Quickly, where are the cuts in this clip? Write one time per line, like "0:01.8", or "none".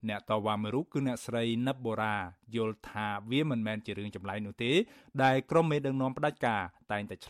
none

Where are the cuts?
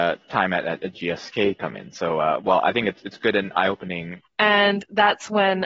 0:04.2

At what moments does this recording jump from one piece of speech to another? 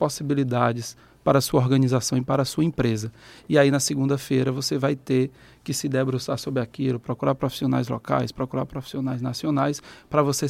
none

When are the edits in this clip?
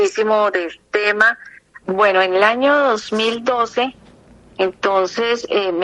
0:01.8

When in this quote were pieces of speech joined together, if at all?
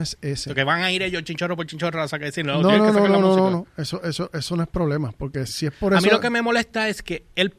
0:05.5

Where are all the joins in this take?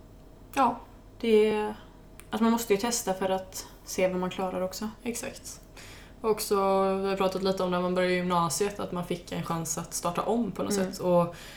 none

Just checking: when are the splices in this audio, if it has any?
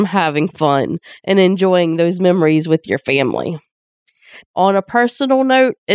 0:04.4

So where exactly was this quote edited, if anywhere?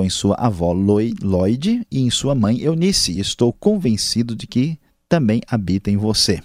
none

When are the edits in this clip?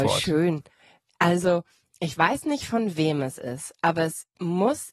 none

